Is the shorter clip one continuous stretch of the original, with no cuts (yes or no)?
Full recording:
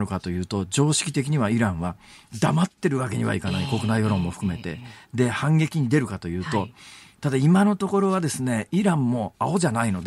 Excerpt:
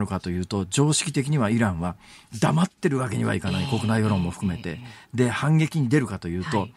yes